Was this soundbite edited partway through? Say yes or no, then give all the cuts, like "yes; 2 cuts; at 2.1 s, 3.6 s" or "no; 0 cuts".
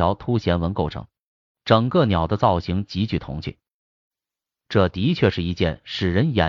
no; 0 cuts